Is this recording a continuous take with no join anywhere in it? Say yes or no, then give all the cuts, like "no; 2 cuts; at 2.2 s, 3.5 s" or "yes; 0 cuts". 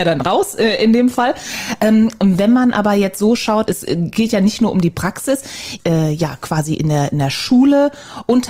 no; 2 cuts; at 3.7 s, 5.8 s